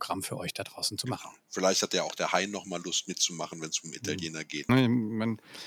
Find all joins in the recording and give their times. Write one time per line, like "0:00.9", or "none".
0:01.4
0:04.7